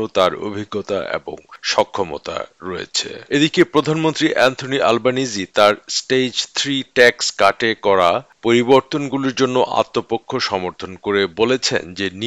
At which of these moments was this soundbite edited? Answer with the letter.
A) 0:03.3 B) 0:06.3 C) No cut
A